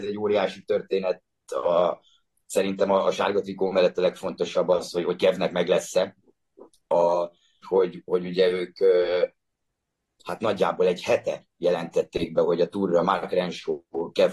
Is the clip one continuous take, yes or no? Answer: no